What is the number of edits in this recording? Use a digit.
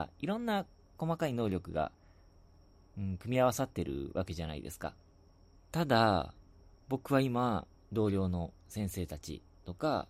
2